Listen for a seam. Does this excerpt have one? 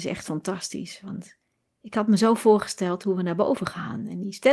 no; 0 cuts

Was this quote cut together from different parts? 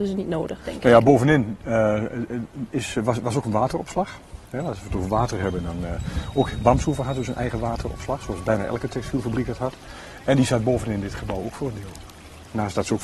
no; 0 cuts

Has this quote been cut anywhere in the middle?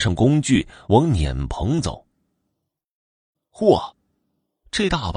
yes; 1 cut; at 3.3 s

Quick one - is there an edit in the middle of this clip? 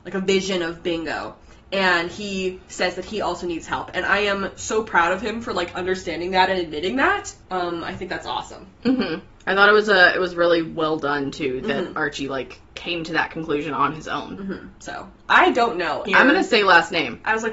yes; 2 cuts; at 14.7 s, 16.1 s

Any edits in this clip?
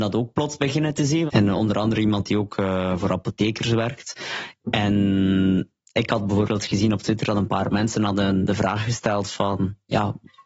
yes; 1 cut; at 1.3 s

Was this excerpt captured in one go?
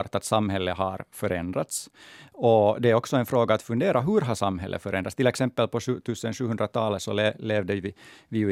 yes; 0 cuts

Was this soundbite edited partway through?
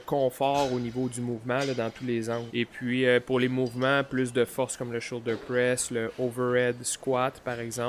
yes; 1 cut; at 2.5 s

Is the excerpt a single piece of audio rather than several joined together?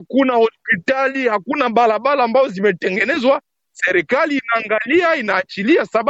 yes; 0 cuts

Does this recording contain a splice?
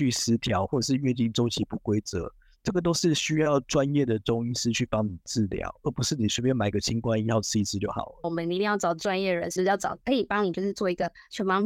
yes; 2 cuts; at 8.2 s, 9.6 s

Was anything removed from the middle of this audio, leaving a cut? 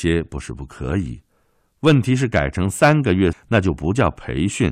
yes; 1 cut; at 3.3 s

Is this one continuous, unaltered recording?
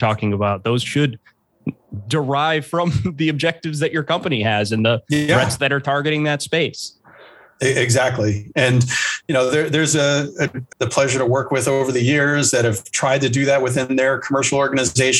no; 1 cut; at 10.7 s

